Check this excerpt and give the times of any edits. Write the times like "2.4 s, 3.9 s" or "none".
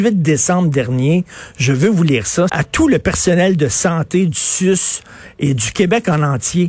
2.5 s